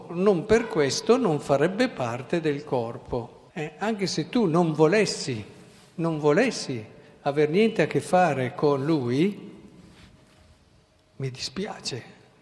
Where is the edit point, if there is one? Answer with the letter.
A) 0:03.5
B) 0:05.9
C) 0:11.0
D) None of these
A